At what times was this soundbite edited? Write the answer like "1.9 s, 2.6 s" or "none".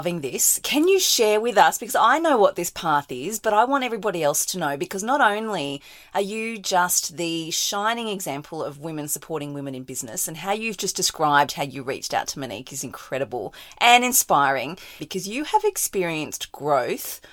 15.0 s